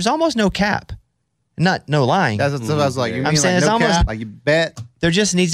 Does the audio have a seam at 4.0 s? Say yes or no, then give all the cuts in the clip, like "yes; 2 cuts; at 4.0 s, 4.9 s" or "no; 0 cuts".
yes; 1 cut; at 4.0 s